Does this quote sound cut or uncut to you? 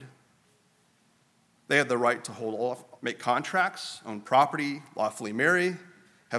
cut